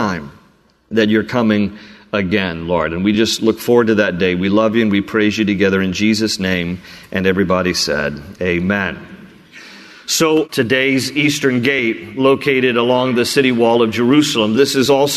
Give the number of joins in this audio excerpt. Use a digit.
0